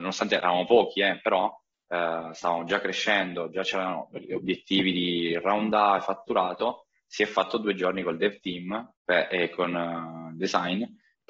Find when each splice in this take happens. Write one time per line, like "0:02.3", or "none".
0:09.0